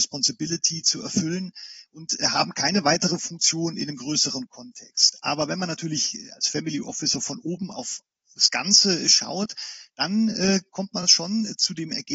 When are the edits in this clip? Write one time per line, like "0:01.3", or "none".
none